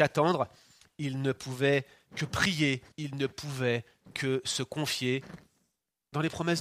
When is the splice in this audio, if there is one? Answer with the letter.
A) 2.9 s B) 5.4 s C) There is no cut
A